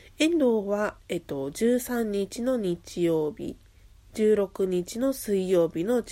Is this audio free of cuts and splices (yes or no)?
no